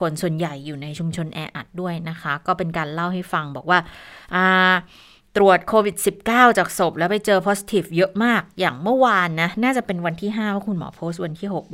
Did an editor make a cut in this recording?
no; 0 cuts

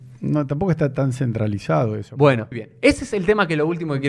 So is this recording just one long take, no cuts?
no; 1 cut; at 2.5 s

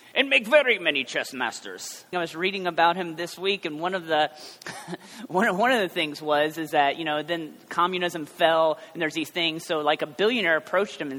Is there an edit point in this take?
yes; 1 cut; at 2.1 s

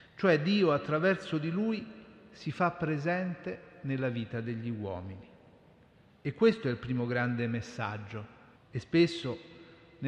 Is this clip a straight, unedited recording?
no; 1 cut; at 8.6 s

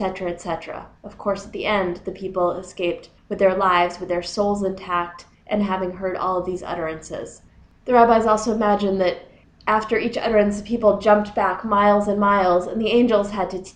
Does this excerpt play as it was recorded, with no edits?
yes; 0 cuts

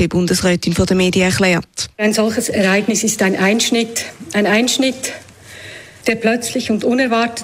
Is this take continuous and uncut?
yes; 0 cuts

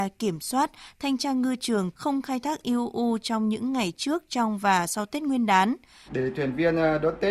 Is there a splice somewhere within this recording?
yes; 2 cuts; at 1.9 s, 6.1 s

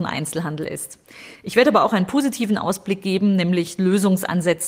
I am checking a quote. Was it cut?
no; 0 cuts

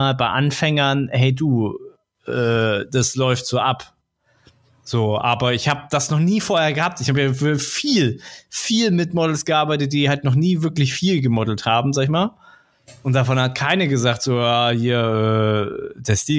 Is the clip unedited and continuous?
yes; 0 cuts

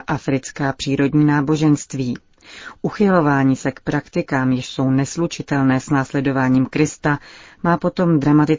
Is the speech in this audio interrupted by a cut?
no; 0 cuts

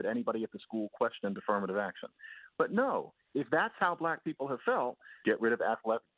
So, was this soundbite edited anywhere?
yes; 2 cuts; at 2.5 s, 5.2 s

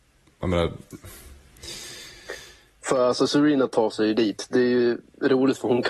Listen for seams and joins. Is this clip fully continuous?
yes; 0 cuts

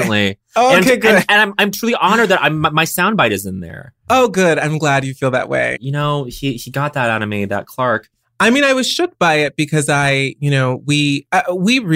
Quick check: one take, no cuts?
no; 1 cut; at 5.8 s

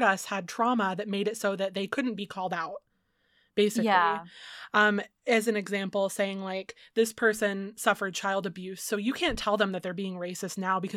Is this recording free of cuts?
yes; 0 cuts

